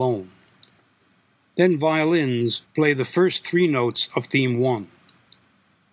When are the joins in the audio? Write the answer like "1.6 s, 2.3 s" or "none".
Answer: 2.6 s